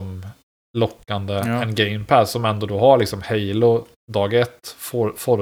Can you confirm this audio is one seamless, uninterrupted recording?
no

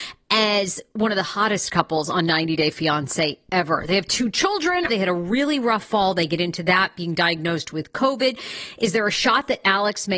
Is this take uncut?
no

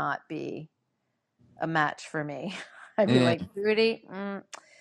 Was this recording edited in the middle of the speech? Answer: no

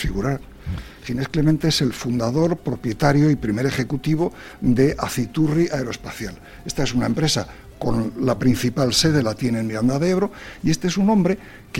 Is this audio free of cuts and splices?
no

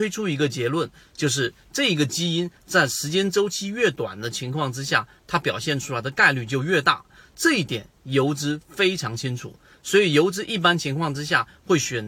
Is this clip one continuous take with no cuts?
yes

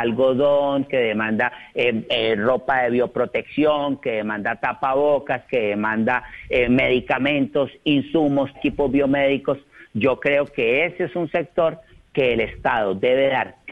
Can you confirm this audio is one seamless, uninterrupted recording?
no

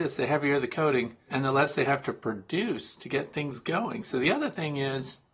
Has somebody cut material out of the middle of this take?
yes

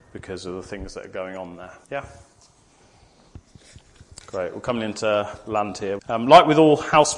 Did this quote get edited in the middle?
yes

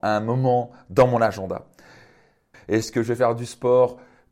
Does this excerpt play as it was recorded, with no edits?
no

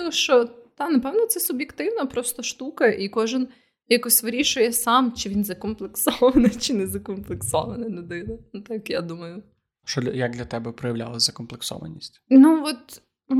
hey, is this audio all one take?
no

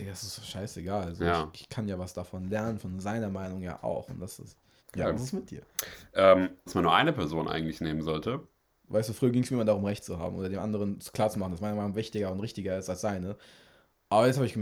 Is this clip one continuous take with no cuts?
no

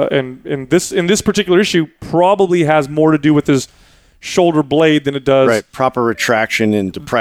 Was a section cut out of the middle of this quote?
no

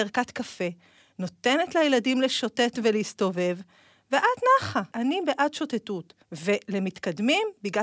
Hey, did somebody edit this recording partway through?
yes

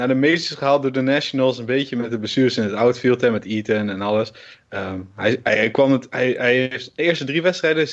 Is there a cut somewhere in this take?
no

